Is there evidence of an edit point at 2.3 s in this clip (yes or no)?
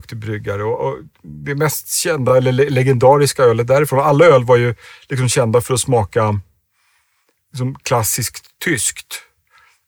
no